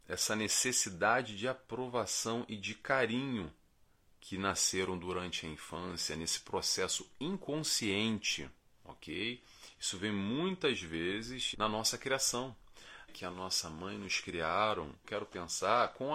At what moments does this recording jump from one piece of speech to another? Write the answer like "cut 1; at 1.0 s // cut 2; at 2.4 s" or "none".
cut 1; at 11.5 s // cut 2; at 13.1 s // cut 3; at 15.0 s